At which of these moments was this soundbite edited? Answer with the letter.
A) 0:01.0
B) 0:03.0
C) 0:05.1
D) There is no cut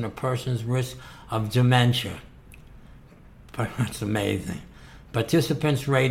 D